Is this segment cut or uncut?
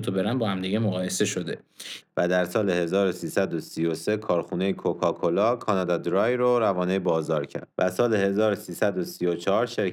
cut